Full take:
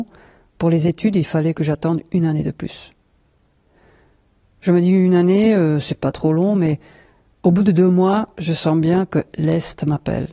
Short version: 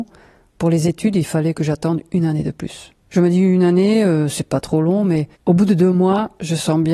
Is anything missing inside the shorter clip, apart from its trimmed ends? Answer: yes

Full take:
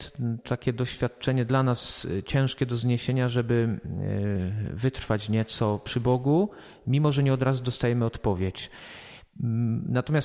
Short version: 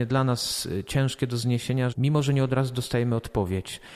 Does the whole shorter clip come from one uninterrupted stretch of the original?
no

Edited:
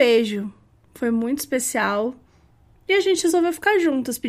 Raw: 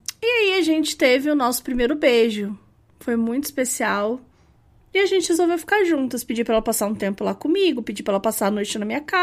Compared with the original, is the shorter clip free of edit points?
yes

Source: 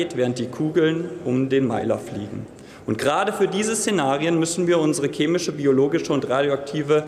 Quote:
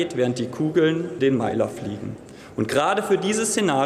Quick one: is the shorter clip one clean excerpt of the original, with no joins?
no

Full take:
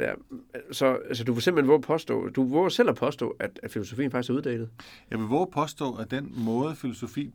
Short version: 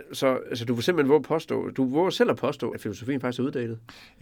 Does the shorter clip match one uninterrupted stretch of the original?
no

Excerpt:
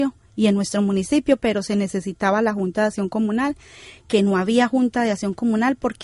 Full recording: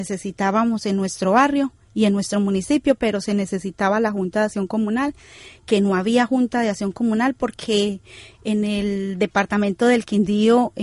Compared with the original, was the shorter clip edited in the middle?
no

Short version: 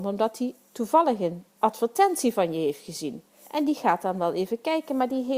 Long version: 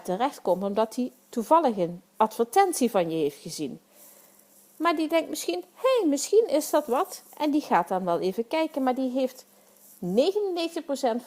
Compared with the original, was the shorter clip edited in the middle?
yes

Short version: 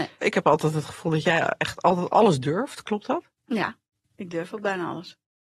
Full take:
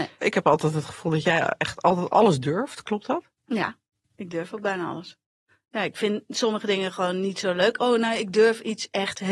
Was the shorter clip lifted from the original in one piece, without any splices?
yes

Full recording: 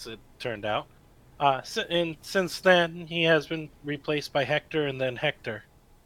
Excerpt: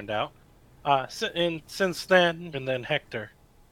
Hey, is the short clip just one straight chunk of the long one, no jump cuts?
no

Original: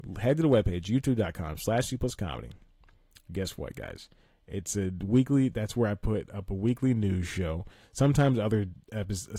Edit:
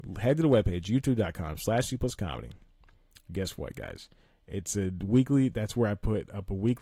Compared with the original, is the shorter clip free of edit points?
yes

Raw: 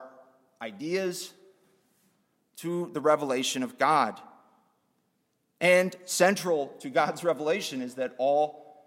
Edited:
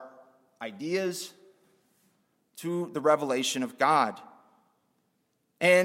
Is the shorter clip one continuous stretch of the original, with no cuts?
yes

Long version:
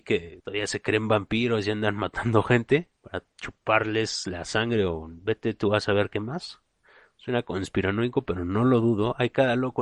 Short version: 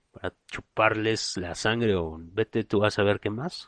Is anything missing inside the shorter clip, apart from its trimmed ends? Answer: no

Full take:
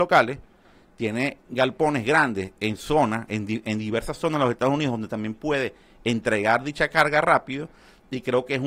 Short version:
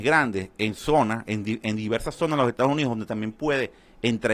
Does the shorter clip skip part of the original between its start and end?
no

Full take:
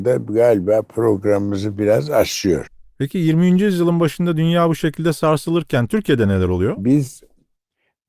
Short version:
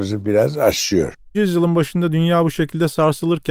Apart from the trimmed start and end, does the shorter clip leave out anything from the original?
yes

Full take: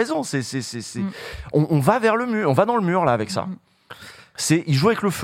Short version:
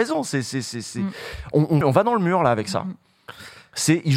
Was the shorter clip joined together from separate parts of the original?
yes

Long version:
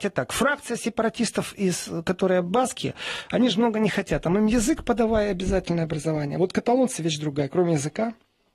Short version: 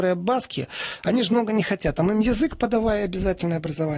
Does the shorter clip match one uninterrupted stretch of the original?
yes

